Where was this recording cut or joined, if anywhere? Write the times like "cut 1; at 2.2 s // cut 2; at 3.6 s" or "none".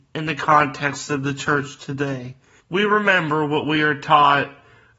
cut 1; at 2.6 s